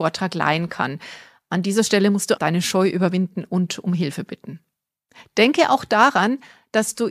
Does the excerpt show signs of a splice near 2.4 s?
yes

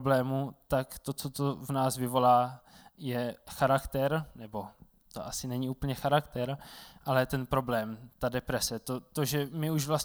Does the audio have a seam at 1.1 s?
no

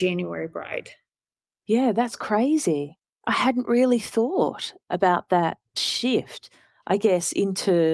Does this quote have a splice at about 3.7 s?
no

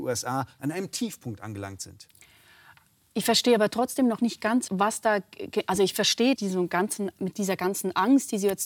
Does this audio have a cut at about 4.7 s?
yes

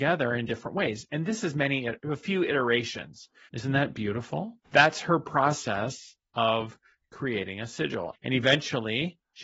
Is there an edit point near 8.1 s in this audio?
yes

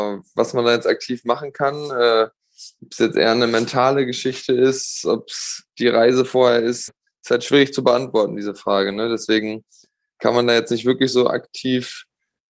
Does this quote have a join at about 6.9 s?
yes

